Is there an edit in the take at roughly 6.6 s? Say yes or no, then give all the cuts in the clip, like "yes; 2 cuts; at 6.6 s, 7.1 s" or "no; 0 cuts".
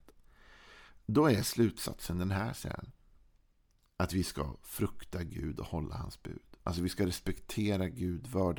no; 0 cuts